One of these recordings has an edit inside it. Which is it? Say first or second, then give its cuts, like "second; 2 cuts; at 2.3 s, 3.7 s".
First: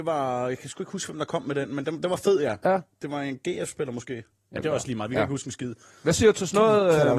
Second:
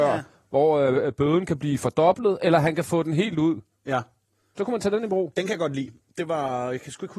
first; 1 cut; at 4.6 s